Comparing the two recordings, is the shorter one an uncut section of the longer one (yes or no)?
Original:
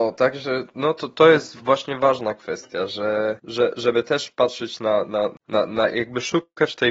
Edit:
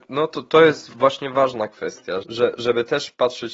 no